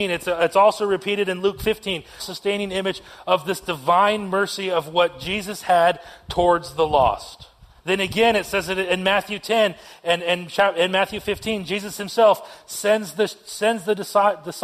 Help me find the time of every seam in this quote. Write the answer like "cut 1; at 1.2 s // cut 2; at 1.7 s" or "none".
cut 1; at 2.2 s